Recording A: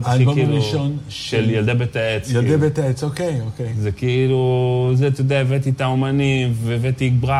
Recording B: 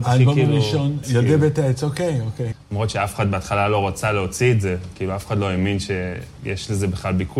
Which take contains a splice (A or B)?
B